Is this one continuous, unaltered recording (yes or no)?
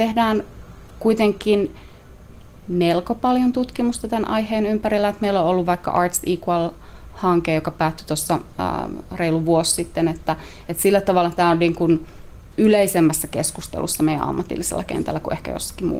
yes